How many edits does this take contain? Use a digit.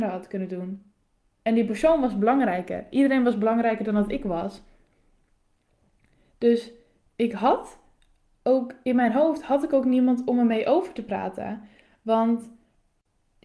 0